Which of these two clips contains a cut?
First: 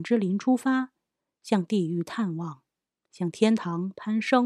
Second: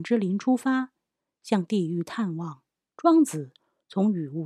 second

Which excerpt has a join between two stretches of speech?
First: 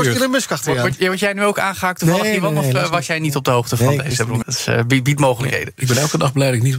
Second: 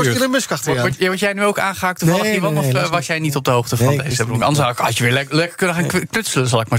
first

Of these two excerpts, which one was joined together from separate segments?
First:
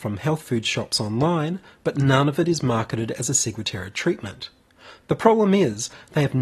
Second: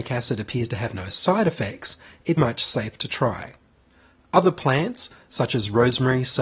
second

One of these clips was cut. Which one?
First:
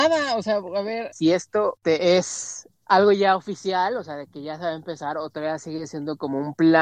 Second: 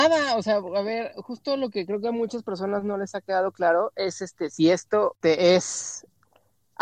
first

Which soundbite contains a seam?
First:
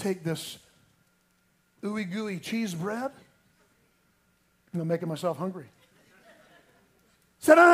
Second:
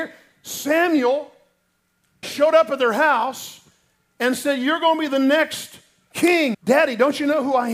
second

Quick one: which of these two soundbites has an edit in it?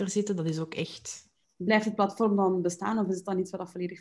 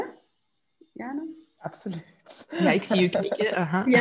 first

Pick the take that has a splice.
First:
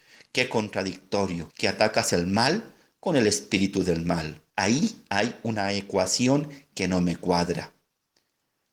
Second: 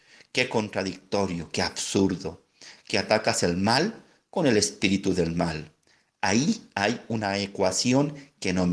first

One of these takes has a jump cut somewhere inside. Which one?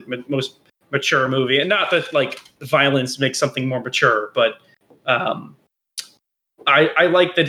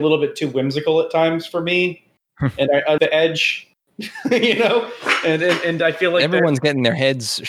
second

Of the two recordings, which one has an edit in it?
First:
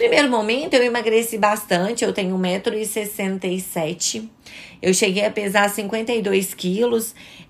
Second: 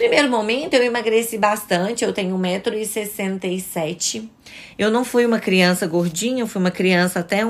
second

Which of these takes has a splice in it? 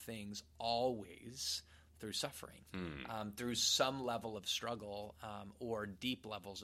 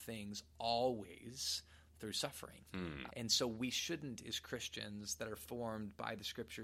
second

